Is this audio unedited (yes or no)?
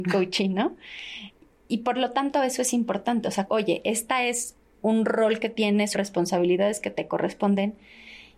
no